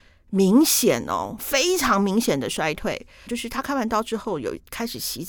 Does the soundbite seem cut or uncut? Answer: cut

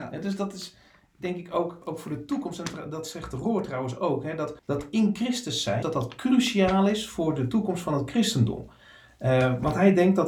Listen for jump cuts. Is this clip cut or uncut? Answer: cut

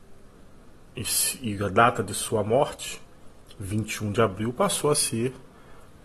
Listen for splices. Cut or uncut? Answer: uncut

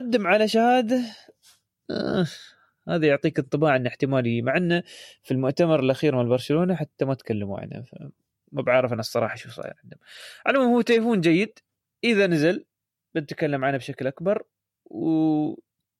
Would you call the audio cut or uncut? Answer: uncut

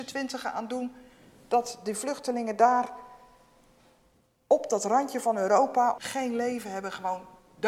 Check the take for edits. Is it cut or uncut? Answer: cut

